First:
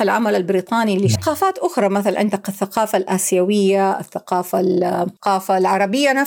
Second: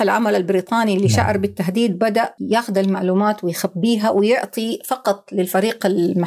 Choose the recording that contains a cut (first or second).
first